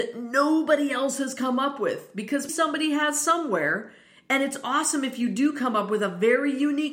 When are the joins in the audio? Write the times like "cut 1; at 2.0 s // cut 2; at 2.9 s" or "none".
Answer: cut 1; at 2.5 s

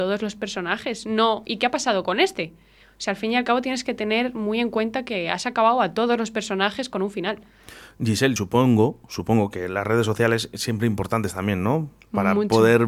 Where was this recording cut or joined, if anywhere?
none

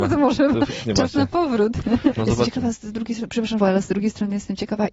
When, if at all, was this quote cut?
cut 1; at 2.1 s // cut 2; at 3.6 s

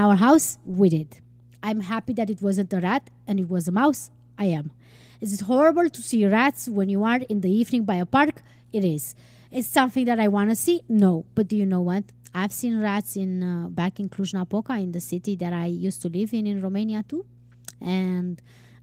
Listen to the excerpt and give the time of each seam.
none

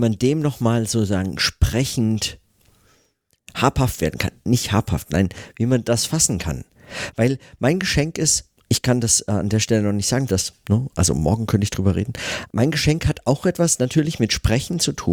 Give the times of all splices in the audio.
cut 1; at 10.3 s // cut 2; at 12.5 s

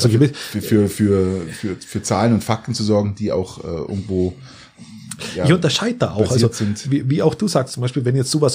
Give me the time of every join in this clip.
none

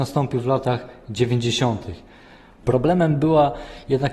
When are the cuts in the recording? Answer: cut 1; at 2.6 s

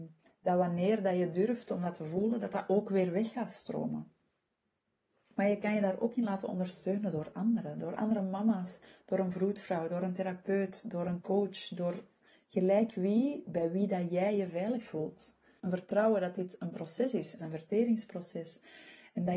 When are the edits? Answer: cut 1; at 15.6 s // cut 2; at 17.4 s

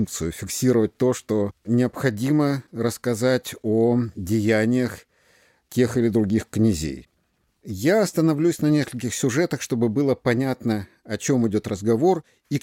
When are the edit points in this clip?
none

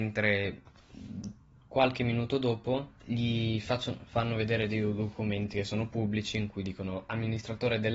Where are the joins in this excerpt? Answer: none

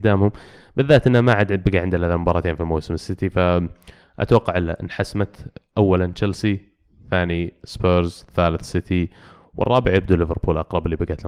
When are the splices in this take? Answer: none

